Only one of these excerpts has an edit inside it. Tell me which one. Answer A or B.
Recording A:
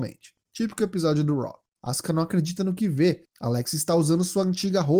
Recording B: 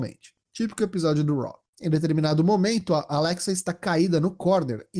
A